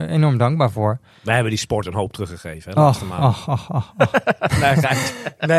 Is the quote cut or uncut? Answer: uncut